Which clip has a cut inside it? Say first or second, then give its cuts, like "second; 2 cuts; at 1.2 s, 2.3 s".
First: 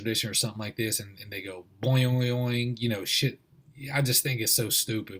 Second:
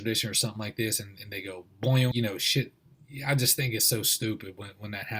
second; 1 cut; at 2.1 s